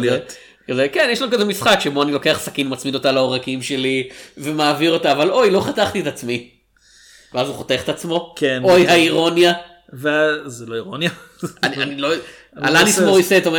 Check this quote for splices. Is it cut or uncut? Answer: uncut